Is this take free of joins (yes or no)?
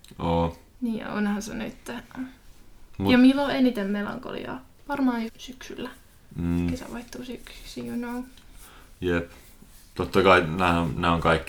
no